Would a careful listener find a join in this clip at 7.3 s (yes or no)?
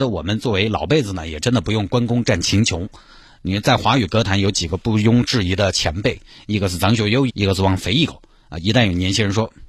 yes